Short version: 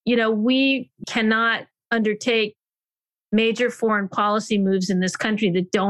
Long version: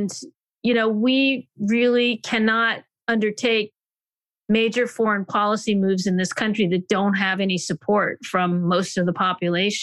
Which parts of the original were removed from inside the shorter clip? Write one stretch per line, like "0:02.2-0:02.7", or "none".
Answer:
0:01.6-0:02.2